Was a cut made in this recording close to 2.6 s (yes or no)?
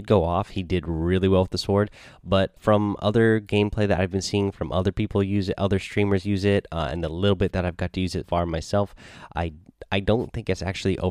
yes